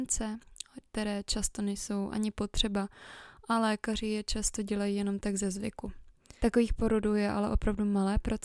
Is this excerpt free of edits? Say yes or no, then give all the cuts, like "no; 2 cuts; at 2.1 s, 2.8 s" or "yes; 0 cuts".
no; 1 cut; at 6.4 s